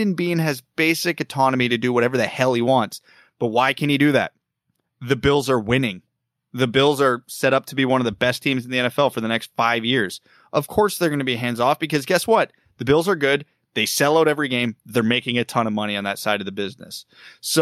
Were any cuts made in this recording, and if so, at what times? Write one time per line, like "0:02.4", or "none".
none